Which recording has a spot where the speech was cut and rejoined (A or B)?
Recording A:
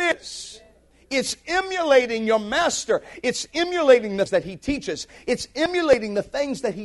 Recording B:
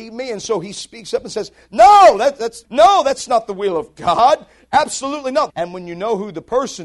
B